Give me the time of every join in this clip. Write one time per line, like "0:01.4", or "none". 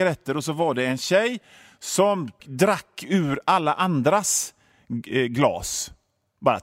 0:02.4